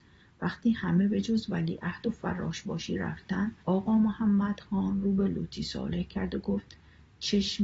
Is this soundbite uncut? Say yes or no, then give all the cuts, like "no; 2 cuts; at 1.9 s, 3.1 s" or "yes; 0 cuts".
no; 1 cut; at 3.6 s